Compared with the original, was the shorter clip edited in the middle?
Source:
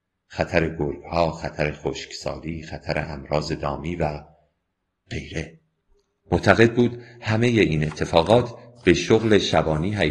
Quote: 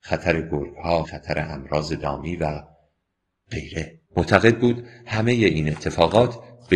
yes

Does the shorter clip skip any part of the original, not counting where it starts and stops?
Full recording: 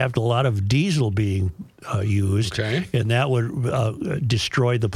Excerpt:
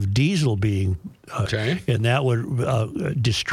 yes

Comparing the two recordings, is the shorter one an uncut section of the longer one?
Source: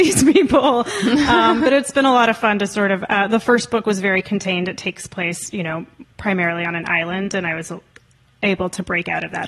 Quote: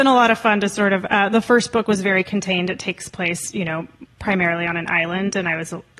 yes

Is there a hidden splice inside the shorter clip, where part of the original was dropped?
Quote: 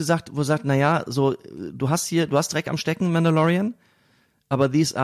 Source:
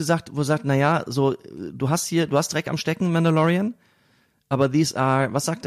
no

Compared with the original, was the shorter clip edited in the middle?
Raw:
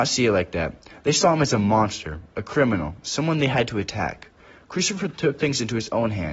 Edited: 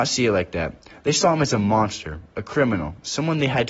no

